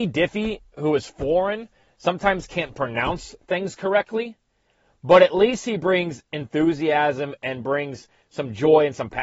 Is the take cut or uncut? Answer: uncut